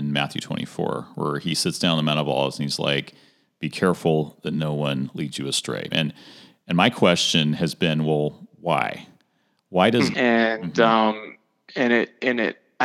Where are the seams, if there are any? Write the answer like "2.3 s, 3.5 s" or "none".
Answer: 5.9 s, 10.1 s

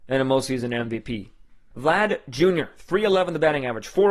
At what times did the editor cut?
1.7 s

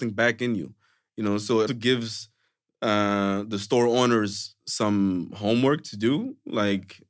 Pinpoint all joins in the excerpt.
1.7 s

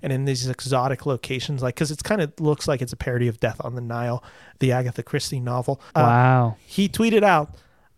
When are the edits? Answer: 5.9 s

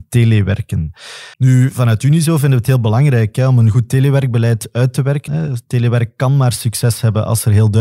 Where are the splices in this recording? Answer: 1.3 s, 5.3 s

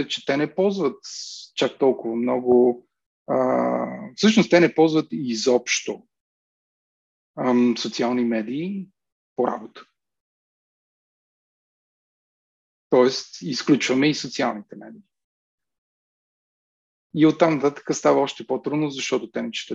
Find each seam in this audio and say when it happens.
none

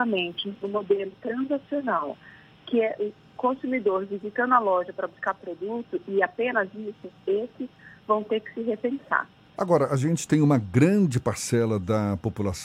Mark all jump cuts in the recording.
9.5 s

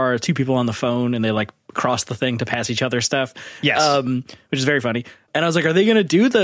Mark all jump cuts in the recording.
none

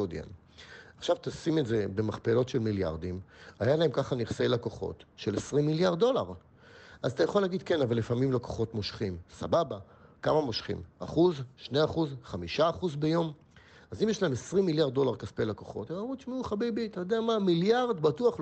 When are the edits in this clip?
none

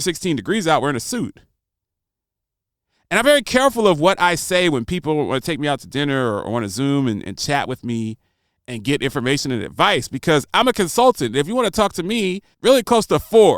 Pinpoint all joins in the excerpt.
12.5 s

